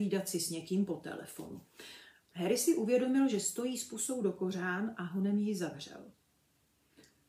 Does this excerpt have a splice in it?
no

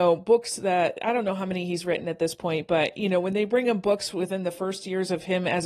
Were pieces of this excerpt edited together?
no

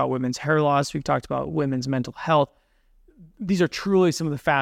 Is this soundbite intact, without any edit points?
yes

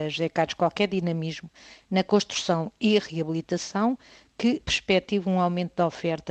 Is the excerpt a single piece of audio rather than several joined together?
yes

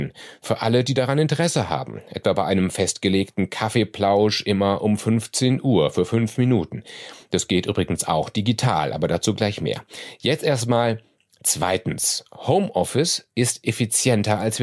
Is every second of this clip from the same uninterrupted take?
yes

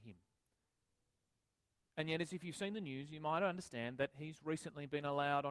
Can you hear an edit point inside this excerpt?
no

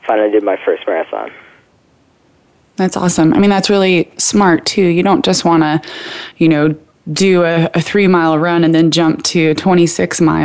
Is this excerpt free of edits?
yes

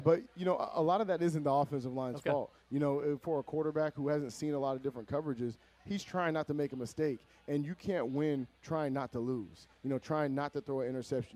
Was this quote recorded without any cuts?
no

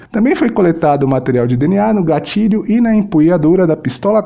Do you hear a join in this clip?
no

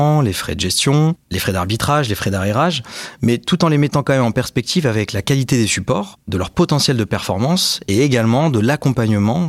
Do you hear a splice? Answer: no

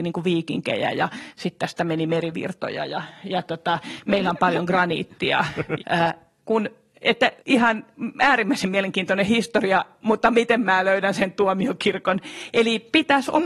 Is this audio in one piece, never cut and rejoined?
no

